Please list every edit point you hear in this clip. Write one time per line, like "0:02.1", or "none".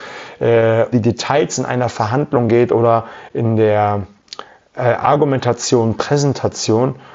0:00.9